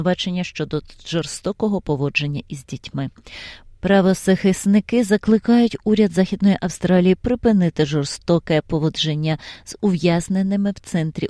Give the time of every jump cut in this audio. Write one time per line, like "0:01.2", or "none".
0:03.6